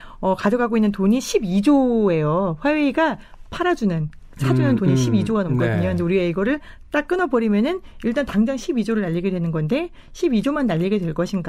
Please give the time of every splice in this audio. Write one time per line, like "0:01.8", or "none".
none